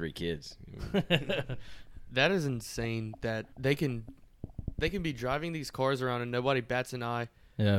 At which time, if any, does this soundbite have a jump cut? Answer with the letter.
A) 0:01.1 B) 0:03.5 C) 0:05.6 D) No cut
B